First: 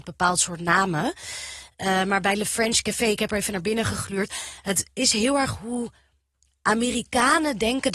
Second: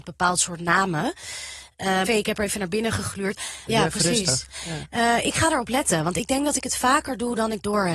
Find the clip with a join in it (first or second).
second